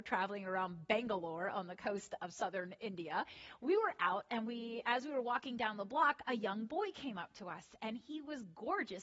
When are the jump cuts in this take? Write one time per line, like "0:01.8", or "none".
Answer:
none